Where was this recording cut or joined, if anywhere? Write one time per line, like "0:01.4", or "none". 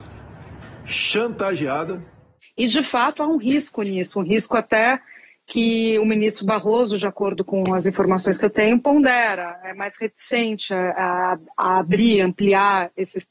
none